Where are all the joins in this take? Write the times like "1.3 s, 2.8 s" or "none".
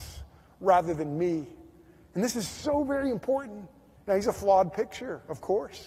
4.0 s